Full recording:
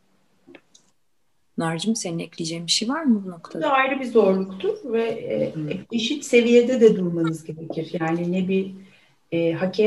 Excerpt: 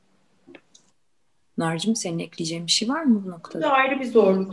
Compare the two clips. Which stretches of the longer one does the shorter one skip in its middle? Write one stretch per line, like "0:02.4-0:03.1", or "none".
none